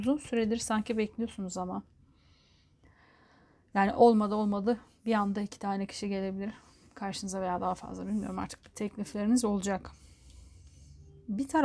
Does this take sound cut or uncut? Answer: uncut